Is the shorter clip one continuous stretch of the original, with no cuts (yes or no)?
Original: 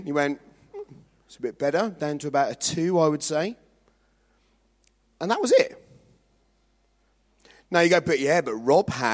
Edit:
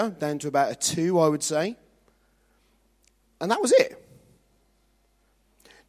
yes